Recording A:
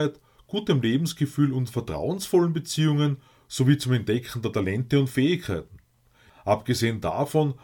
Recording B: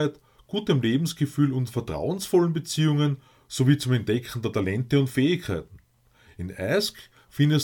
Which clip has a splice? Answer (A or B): A